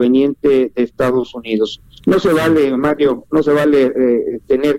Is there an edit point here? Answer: no; 0 cuts

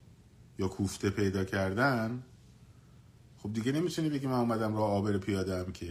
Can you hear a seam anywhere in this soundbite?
yes; 1 cut; at 3.2 s

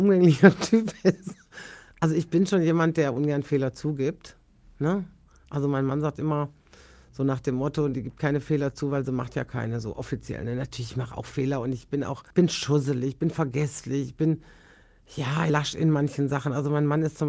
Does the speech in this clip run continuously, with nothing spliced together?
no; 2 cuts; at 12.3 s, 15.5 s

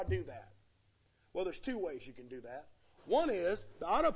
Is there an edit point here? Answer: no; 0 cuts

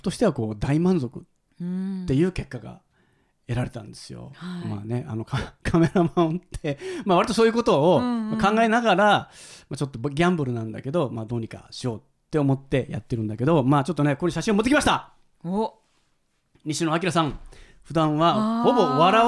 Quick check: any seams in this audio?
no; 0 cuts

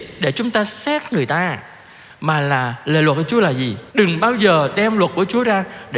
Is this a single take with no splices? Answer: no; 1 cut; at 3.9 s

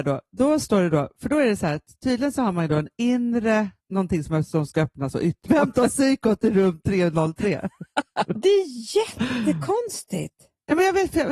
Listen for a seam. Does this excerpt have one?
yes; 3 cuts; at 3.8 s, 5.5 s, 8.3 s

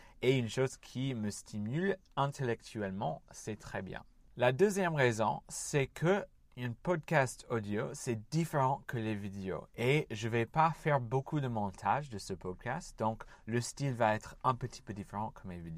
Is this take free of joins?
no; 2 cuts; at 2.0 s, 9.7 s

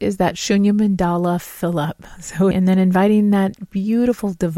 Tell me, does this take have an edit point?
yes; 1 cut; at 2.5 s

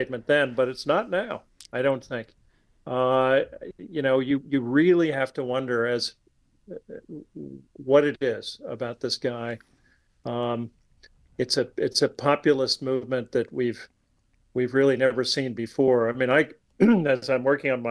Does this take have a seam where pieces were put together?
no; 0 cuts

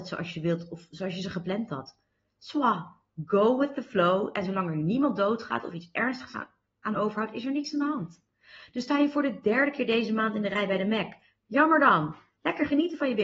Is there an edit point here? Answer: no; 0 cuts

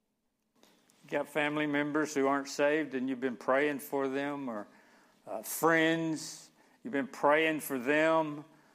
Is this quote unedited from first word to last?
yes; 0 cuts

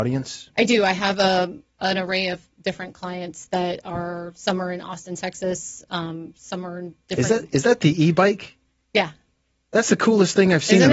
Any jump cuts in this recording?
no; 0 cuts

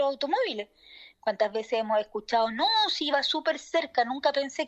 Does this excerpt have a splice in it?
yes; 1 cut; at 1.1 s

